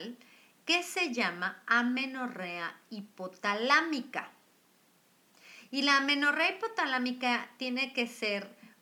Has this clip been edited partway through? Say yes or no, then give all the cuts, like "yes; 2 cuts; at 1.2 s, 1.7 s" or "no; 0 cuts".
no; 0 cuts